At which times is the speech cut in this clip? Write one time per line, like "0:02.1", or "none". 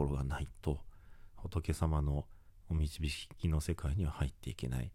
0:01.3